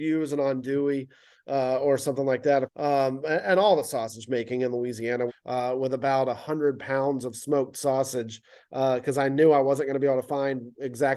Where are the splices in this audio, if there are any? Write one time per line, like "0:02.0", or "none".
0:02.7
0:05.3

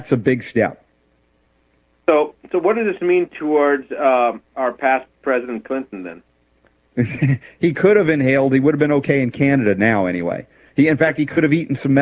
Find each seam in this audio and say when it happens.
0:04.4

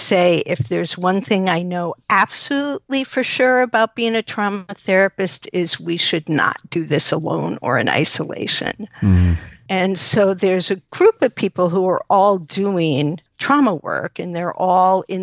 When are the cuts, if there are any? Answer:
0:09.7
0:13.3

